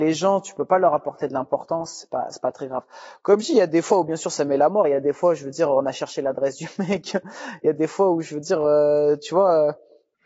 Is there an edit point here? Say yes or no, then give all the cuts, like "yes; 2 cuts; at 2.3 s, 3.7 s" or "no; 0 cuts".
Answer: no; 0 cuts